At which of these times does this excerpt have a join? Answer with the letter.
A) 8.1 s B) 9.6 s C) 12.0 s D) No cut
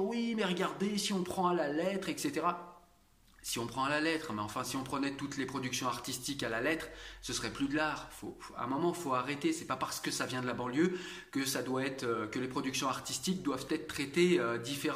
D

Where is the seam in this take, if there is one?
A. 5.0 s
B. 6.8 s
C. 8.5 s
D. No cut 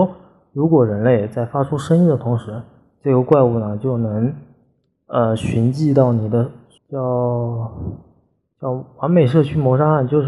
B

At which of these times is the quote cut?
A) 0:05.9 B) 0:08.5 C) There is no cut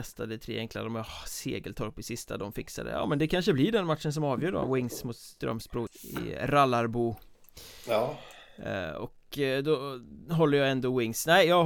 A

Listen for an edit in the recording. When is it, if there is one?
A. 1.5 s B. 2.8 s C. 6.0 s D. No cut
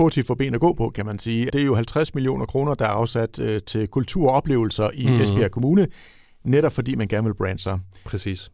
A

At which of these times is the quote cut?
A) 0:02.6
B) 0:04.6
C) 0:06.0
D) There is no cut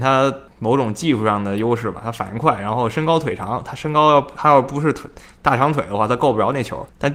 D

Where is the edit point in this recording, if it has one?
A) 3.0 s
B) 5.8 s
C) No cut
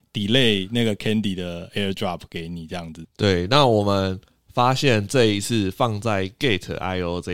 A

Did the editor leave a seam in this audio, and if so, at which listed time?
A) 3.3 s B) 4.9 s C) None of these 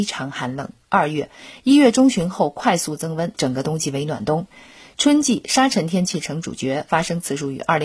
A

